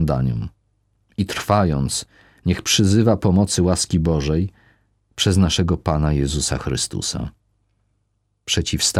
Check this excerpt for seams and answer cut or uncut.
uncut